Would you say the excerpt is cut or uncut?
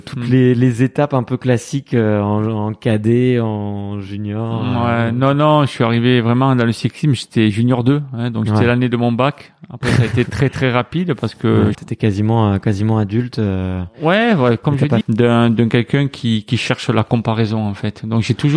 cut